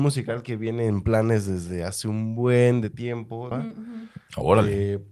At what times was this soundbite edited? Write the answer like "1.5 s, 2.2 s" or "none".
3.5 s